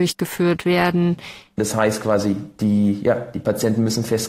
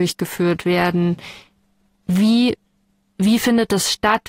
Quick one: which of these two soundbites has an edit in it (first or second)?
first